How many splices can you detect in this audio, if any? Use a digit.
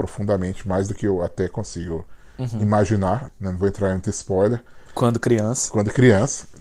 2